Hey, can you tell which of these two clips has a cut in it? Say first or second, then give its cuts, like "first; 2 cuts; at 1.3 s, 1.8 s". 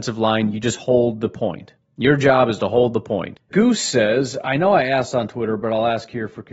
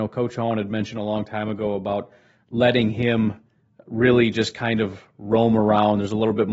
first; 1 cut; at 3.5 s